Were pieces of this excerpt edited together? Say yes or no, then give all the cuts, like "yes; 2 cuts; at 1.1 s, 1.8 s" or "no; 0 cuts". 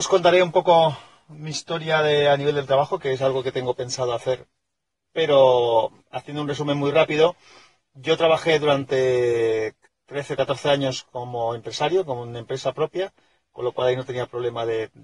no; 0 cuts